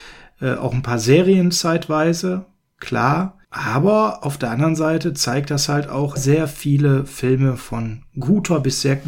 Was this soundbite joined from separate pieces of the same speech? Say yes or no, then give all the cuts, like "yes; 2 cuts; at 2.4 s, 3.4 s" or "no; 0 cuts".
yes; 2 cuts; at 3.4 s, 6.2 s